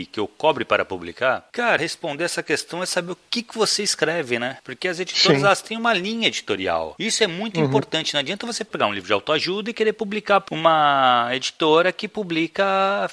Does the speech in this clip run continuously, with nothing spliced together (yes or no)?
no